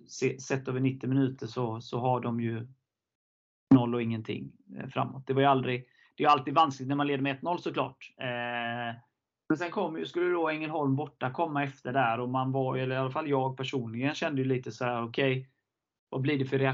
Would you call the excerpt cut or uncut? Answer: cut